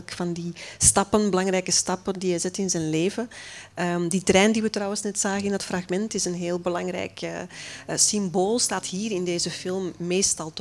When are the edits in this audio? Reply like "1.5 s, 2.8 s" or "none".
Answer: none